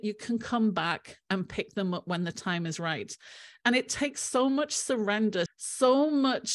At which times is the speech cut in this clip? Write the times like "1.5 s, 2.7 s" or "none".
5.5 s